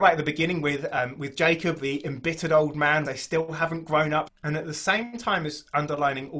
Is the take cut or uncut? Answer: cut